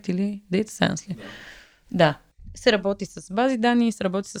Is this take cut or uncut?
uncut